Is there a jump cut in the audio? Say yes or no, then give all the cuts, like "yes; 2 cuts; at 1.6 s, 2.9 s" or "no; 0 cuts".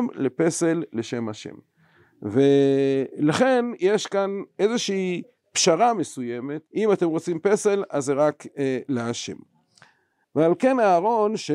yes; 2 cuts; at 6.7 s, 10.2 s